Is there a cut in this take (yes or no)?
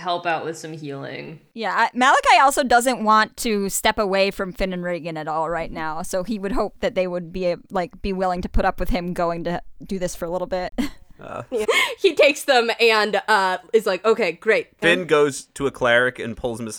yes